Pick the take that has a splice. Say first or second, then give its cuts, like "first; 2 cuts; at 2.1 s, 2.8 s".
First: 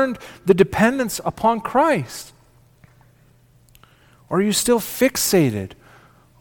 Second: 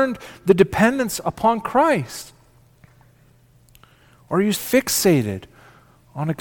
second; 1 cut; at 4.5 s